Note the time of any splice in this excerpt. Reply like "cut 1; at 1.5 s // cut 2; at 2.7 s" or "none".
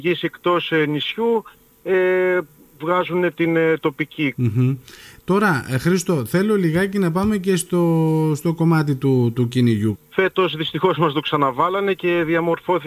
cut 1; at 4.3 s // cut 2; at 10.0 s